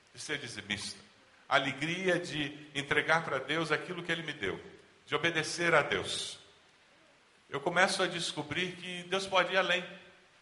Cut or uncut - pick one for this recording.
uncut